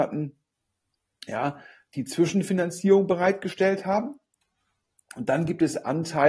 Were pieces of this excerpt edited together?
no; 0 cuts

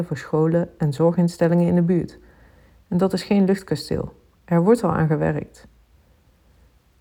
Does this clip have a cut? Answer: no; 0 cuts

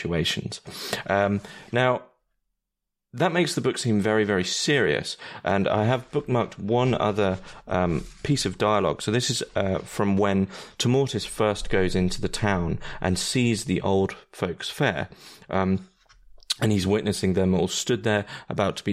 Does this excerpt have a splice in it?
no; 0 cuts

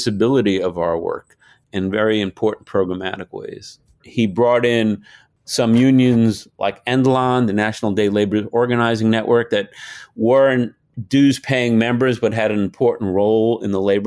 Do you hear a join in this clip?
yes; 1 cut; at 4.0 s

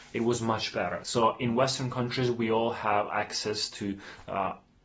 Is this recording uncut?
no; 1 cut; at 1.0 s

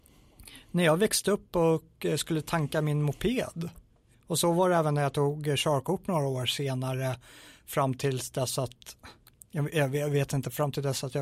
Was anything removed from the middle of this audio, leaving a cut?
yes; 1 cut; at 4.1 s

